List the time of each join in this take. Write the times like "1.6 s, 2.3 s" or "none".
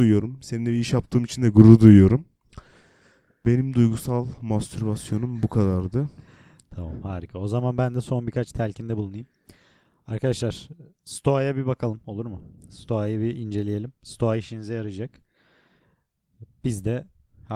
none